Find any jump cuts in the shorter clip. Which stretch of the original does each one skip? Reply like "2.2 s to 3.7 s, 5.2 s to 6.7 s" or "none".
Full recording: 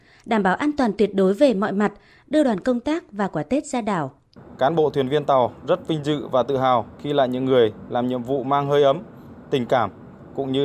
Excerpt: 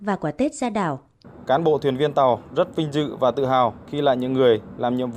none